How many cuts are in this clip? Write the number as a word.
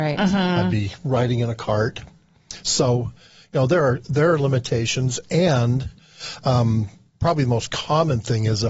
zero